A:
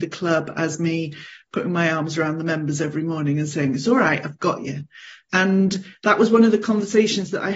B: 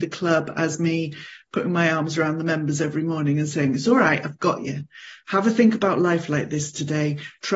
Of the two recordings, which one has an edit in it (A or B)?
A